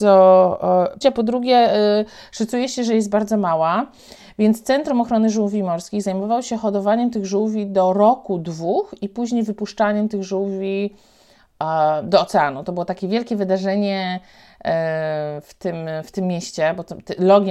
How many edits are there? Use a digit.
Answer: 1